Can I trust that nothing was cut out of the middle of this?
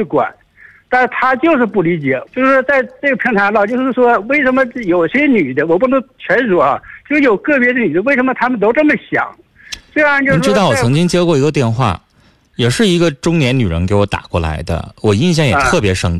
no; 1 cut; at 2.3 s

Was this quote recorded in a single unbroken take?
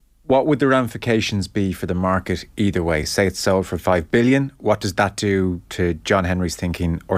yes; 0 cuts

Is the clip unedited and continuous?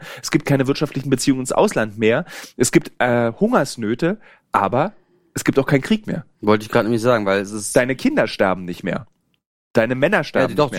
yes; 0 cuts

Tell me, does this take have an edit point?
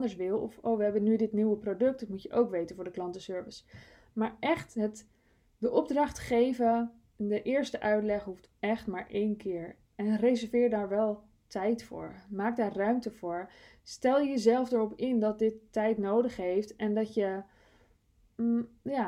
no; 0 cuts

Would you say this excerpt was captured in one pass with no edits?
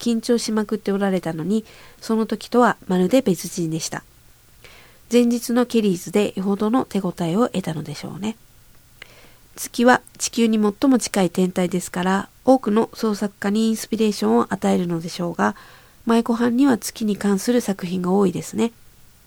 no; 1 cut; at 9.5 s

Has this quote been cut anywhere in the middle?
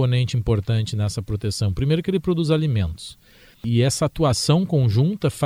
yes; 1 cut; at 3.5 s

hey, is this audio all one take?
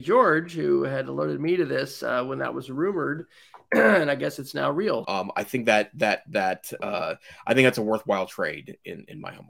no; 1 cut; at 5.0 s

